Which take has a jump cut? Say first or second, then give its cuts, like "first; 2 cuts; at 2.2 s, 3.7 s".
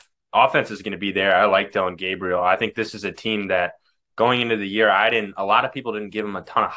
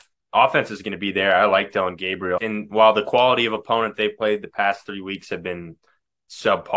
second; 1 cut; at 2.4 s